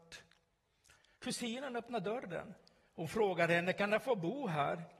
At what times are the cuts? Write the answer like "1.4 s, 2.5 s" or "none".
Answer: 1.1 s